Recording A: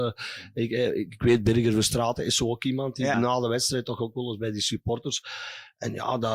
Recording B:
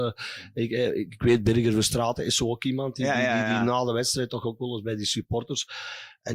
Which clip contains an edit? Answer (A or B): A